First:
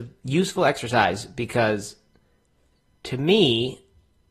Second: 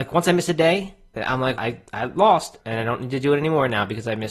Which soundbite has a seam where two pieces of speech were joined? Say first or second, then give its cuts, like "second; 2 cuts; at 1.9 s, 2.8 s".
second; 2 cuts; at 1.5 s, 2.6 s